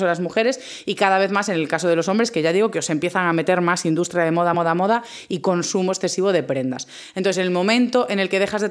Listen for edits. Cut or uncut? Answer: uncut